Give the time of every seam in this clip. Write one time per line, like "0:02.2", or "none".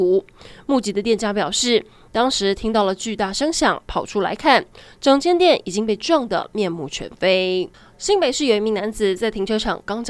none